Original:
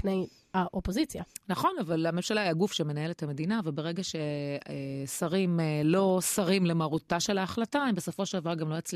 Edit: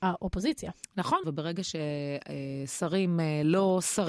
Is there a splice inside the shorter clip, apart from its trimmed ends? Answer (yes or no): yes